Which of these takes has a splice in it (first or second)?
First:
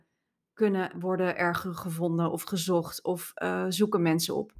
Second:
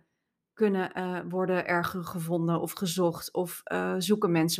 first